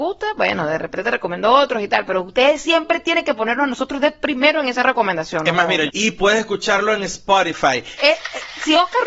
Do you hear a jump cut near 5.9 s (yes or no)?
yes